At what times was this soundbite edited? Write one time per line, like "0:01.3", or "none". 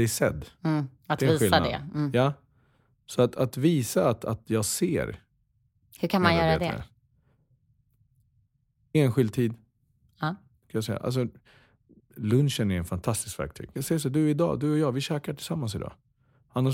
0:13.8